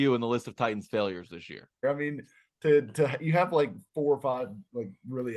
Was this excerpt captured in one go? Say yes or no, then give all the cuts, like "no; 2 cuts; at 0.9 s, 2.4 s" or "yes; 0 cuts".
no; 1 cut; at 1.8 s